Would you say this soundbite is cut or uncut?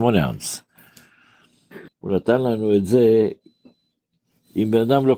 cut